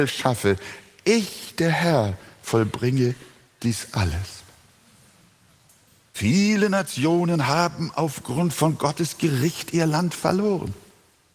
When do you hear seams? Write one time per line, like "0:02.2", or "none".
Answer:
0:06.1